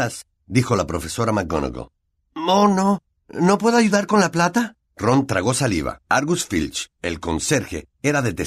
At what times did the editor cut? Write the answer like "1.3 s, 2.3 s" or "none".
4.8 s